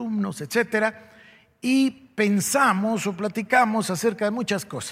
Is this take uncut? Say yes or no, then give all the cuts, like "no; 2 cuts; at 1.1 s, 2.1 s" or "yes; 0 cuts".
yes; 0 cuts